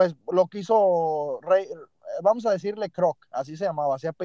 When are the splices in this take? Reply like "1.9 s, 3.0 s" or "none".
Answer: none